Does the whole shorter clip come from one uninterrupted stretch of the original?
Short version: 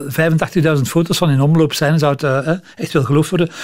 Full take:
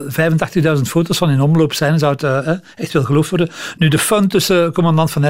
yes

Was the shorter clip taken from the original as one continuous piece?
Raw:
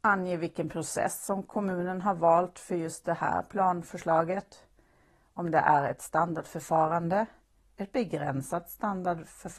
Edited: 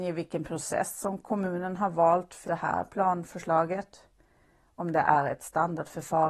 no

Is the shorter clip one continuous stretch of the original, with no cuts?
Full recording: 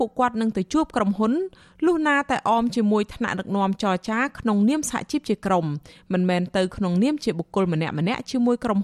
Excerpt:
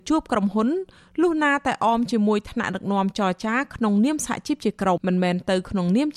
no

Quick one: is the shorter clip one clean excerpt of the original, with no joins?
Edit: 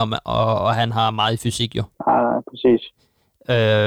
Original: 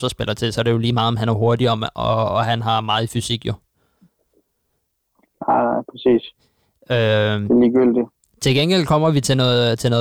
no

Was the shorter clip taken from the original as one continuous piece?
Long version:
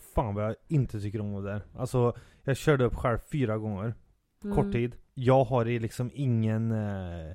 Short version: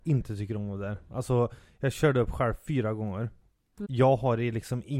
no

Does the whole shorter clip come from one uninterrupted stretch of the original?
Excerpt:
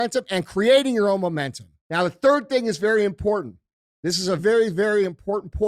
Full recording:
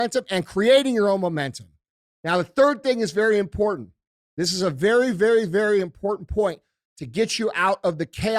no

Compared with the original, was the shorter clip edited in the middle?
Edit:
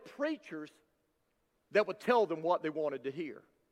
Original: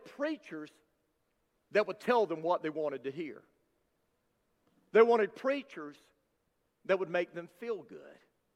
no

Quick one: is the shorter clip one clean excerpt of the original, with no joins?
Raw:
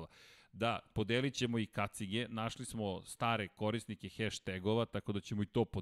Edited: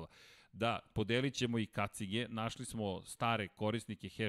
yes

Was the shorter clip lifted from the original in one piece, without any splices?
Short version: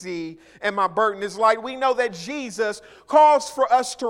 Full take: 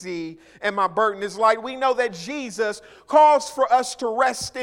yes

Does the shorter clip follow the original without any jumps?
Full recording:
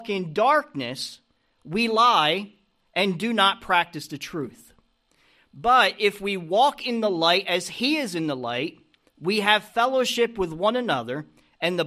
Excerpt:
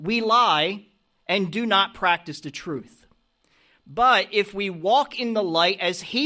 yes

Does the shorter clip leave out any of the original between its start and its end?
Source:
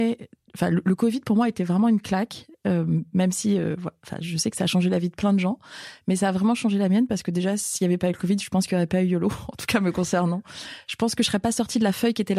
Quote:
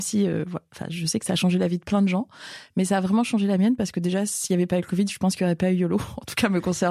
no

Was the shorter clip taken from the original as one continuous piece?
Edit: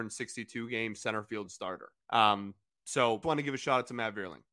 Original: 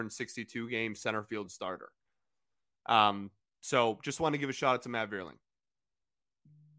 no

